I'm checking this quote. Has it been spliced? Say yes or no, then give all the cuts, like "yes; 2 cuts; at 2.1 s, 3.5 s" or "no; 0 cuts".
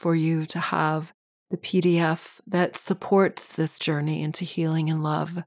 no; 0 cuts